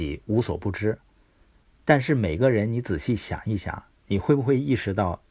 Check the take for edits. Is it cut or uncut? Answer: uncut